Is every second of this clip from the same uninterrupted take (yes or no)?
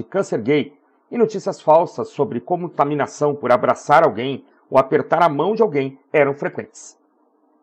yes